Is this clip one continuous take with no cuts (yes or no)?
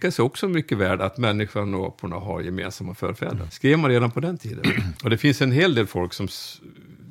no